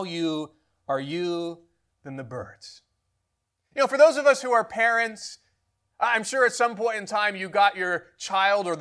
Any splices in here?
no; 0 cuts

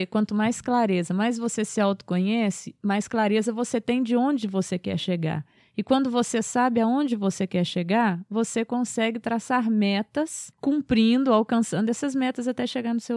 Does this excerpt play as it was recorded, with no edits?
yes; 0 cuts

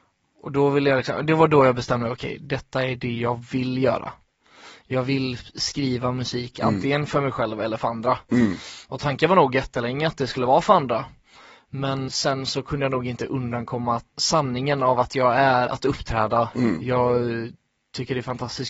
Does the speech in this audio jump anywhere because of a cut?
yes; 3 cuts; at 12.1 s, 14.1 s, 15.7 s

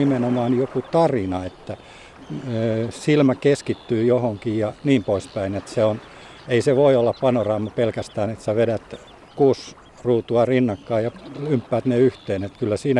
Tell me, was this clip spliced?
no; 0 cuts

